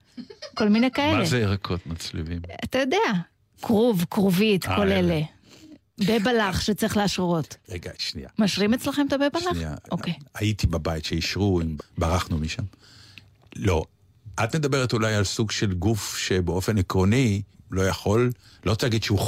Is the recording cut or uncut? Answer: cut